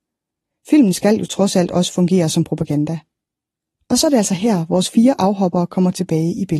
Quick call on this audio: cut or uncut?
uncut